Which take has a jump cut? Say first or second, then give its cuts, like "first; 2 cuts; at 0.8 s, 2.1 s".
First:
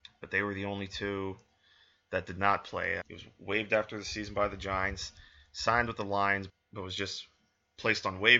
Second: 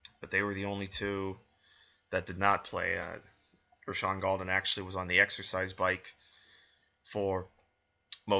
first; 2 cuts; at 3.0 s, 6.5 s